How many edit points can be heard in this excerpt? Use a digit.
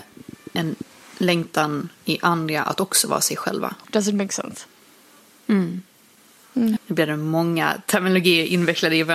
2